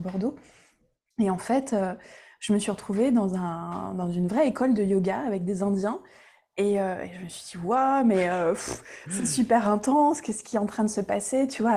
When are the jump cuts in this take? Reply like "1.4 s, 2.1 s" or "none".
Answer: none